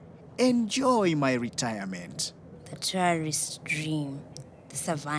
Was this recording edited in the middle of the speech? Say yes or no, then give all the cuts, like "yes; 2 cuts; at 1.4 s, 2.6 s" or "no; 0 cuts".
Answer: no; 0 cuts